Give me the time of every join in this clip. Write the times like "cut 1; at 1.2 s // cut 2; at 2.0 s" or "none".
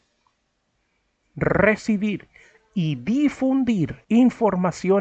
cut 1; at 4.0 s